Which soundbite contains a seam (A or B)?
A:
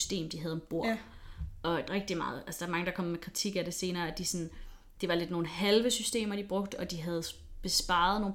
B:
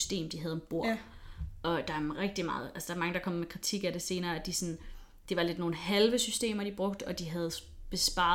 A